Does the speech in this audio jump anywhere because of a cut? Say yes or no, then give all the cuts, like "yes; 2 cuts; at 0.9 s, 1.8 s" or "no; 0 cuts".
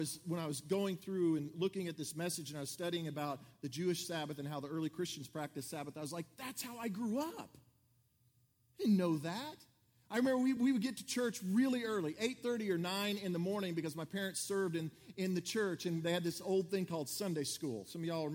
no; 0 cuts